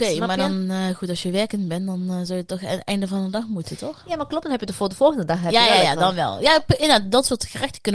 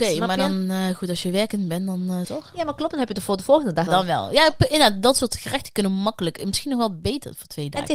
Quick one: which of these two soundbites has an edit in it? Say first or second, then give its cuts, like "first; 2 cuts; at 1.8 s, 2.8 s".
second; 2 cuts; at 2.2 s, 3.9 s